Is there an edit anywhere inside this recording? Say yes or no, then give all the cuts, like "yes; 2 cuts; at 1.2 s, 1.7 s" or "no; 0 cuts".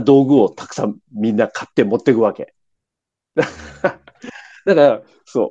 no; 0 cuts